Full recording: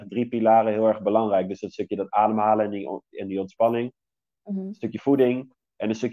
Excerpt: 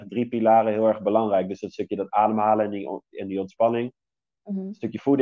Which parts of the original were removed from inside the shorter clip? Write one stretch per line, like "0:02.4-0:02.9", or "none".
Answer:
none